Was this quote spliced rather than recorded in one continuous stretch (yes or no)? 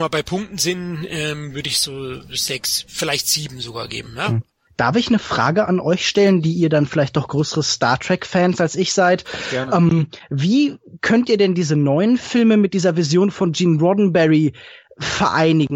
no